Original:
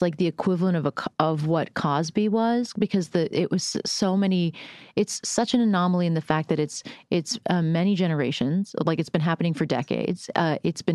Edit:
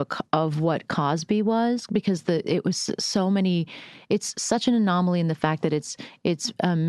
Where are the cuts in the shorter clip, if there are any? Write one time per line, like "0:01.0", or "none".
none